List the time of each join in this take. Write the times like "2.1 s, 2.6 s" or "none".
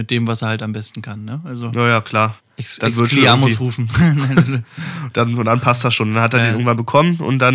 2.4 s